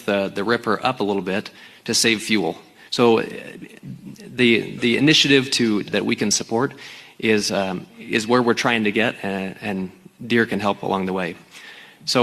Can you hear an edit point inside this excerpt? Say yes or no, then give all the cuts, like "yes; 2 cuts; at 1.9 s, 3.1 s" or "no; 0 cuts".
yes; 2 cuts; at 2.9 s, 5.9 s